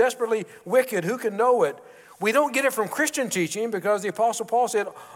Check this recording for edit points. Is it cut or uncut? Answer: uncut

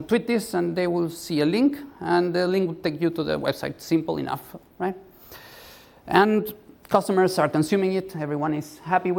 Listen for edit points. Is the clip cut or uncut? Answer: uncut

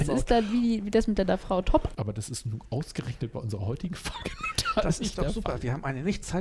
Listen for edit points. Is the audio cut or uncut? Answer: cut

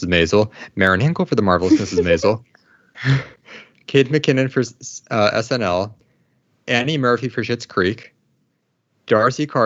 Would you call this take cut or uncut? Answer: uncut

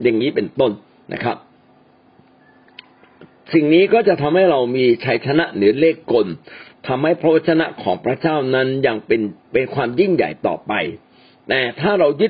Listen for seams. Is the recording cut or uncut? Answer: cut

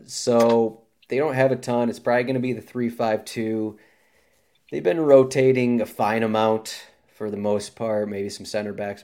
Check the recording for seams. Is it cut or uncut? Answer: uncut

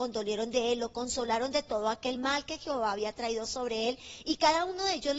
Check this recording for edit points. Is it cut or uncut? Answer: uncut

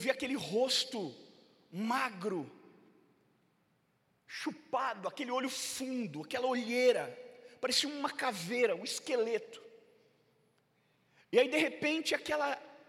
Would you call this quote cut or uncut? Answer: uncut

